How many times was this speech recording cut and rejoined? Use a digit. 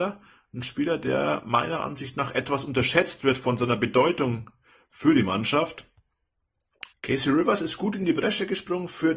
1